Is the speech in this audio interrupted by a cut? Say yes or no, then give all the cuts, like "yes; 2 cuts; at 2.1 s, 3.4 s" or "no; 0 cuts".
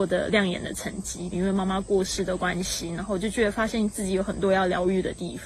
yes; 1 cut; at 1.3 s